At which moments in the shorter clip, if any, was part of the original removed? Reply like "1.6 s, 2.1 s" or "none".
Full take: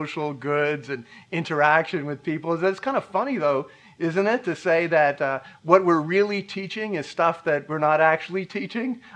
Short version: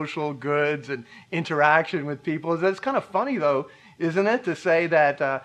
none